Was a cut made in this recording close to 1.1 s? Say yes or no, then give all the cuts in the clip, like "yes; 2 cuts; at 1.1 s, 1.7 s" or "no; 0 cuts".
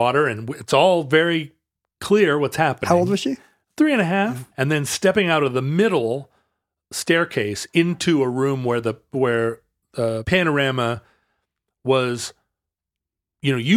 no; 2 cuts; at 4.5 s, 10.2 s